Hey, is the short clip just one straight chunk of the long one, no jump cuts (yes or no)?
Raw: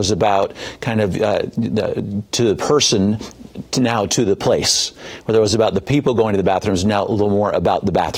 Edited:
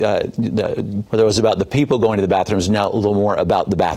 no